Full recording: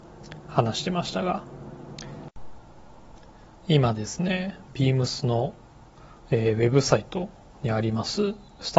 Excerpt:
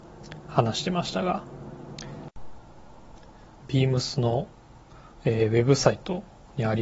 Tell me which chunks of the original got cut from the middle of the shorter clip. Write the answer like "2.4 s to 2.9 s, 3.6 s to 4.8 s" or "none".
3.6 s to 4.7 s